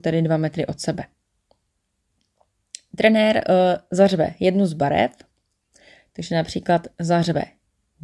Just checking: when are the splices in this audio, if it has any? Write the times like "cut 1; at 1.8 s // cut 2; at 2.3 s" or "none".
none